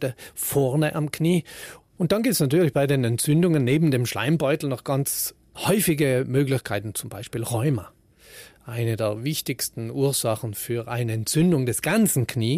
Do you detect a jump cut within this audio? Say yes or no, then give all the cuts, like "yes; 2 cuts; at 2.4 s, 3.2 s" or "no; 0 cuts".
yes; 1 cut; at 1.8 s